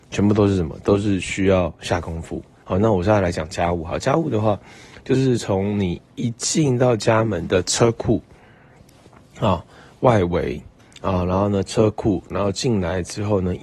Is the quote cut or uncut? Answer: uncut